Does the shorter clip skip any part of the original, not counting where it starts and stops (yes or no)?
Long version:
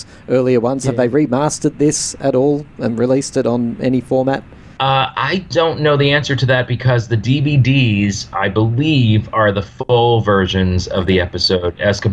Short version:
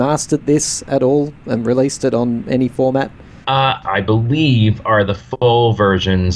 yes